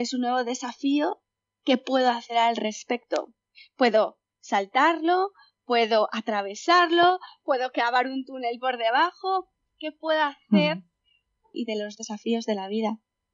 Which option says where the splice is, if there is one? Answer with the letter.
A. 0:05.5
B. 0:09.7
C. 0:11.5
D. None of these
C